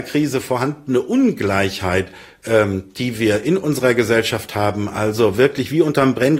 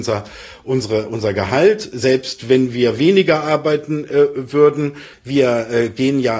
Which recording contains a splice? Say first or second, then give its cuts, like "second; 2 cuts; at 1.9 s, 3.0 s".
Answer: second; 1 cut; at 5.1 s